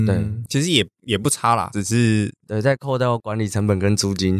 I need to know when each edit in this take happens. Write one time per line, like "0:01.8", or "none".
0:01.7

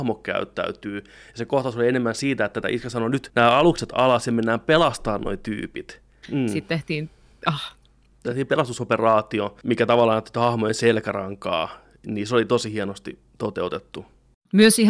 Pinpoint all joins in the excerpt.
0:06.2

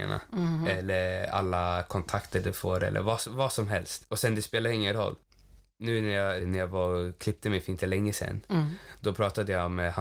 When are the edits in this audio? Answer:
0:06.4

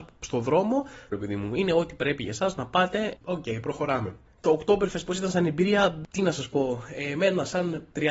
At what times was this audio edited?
0:01.1
0:03.2

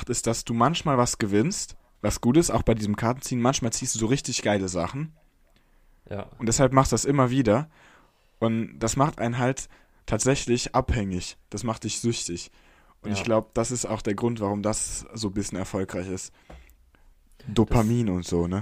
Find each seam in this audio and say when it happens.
none

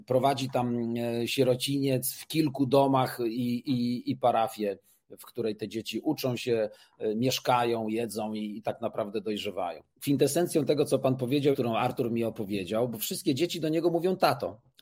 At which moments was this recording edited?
0:09.9
0:11.5

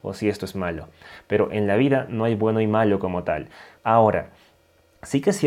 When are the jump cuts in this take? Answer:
0:03.8

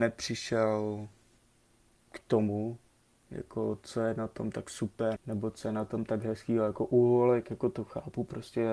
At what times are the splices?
0:05.2

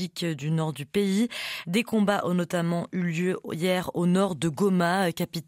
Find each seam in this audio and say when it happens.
0:01.6

